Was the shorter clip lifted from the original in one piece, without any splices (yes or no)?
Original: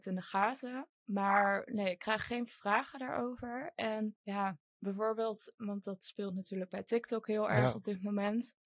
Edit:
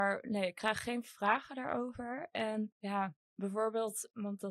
yes